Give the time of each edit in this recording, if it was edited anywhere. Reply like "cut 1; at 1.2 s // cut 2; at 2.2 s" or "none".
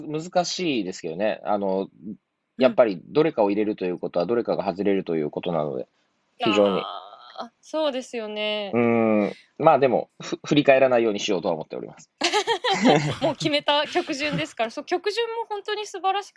cut 1; at 7.6 s

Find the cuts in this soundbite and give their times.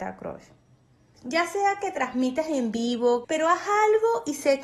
cut 1; at 1.1 s // cut 2; at 3.2 s

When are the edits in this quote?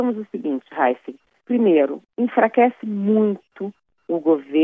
cut 1; at 1.4 s

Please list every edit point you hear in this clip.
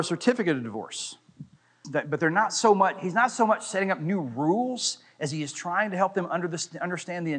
cut 1; at 1.8 s

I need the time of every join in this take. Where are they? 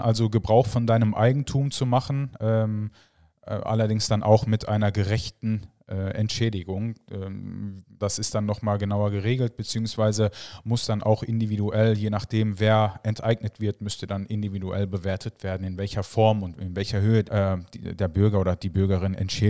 cut 1; at 8.0 s // cut 2; at 17.2 s

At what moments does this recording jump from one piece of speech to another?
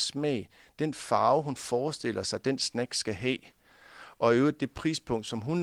none

